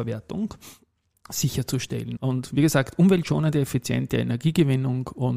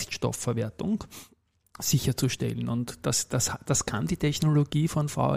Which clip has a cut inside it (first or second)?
first